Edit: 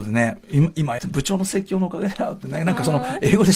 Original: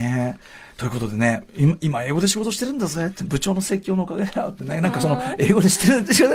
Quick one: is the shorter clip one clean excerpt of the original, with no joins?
no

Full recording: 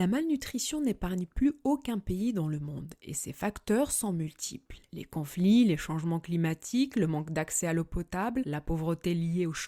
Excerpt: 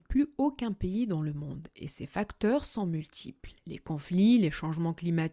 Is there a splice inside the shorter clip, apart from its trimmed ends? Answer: no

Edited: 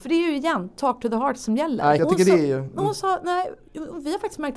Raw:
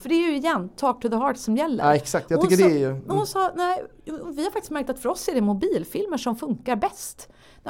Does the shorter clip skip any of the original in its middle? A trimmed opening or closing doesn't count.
yes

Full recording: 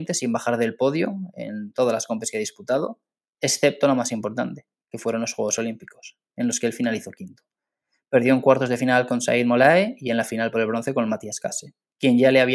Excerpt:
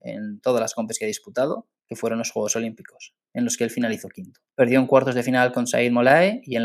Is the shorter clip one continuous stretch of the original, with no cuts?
no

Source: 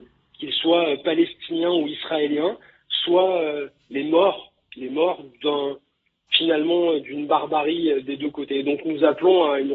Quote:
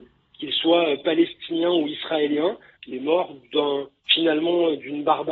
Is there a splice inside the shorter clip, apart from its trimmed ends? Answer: yes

